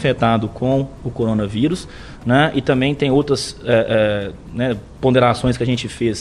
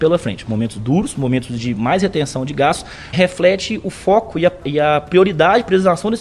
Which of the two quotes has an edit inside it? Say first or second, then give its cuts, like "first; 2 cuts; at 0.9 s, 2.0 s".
second; 2 cuts; at 3.1 s, 4.6 s